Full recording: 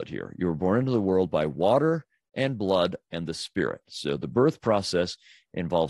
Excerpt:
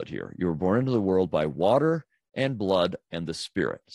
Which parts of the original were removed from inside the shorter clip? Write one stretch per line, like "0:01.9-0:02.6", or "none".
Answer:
none